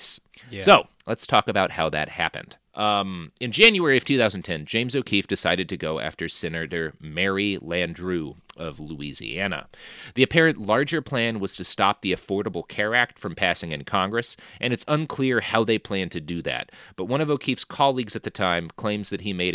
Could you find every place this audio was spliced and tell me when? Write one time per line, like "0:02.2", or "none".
0:02.7